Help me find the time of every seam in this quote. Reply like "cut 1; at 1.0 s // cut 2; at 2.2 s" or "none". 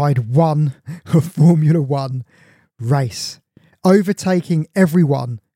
none